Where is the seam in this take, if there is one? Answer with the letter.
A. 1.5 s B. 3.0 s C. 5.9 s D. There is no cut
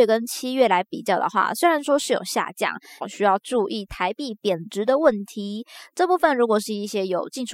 B